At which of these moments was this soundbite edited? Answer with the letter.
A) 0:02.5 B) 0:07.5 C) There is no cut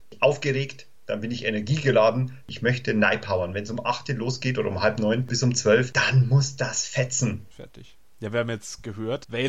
B